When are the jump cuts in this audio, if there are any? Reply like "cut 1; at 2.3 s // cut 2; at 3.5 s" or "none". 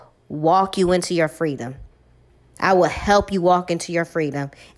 none